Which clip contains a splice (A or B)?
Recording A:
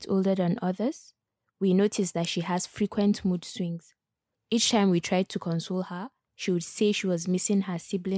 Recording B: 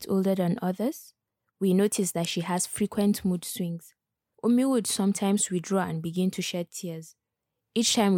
A